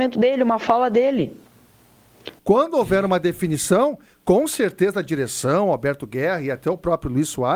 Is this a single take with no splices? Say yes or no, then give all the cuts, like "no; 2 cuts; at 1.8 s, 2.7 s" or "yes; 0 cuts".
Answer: no; 1 cut; at 2.4 s